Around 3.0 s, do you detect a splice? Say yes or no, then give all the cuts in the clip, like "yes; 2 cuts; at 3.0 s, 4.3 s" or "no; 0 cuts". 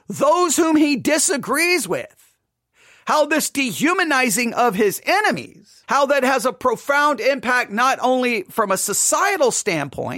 no; 1 cut; at 5.8 s